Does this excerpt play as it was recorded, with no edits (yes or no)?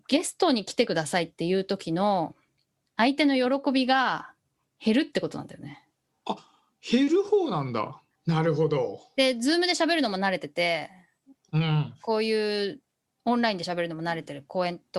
no